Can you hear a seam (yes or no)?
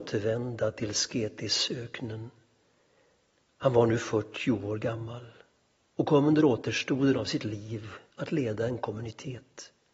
no